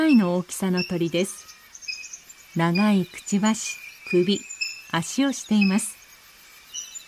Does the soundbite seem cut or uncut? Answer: cut